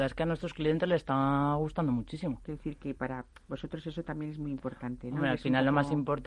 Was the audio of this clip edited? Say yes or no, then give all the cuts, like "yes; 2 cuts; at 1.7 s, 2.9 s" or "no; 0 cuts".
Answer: yes; 1 cut; at 2.4 s